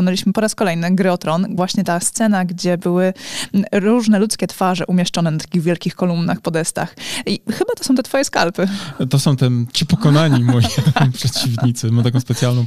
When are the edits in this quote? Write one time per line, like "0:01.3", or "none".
none